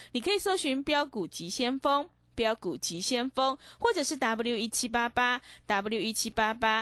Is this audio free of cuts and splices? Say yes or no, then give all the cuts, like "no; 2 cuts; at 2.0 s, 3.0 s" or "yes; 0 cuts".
yes; 0 cuts